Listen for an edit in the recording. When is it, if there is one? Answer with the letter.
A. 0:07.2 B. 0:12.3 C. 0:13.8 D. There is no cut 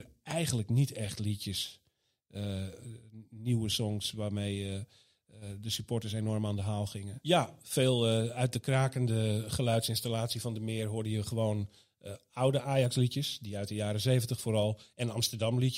A